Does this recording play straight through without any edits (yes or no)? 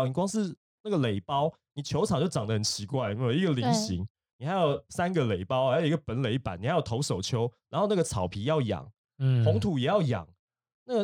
yes